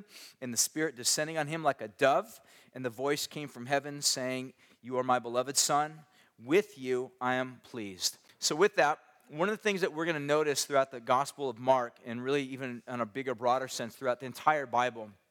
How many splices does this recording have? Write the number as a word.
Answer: one